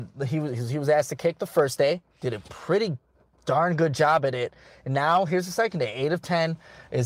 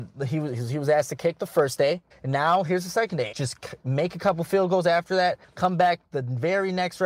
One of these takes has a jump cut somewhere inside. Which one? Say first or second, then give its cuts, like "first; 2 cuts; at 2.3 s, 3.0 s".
second; 3 cuts; at 2.1 s, 3.3 s, 5.4 s